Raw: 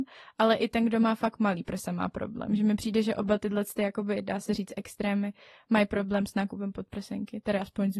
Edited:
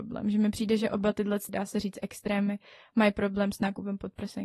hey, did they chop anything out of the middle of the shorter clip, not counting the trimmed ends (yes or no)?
yes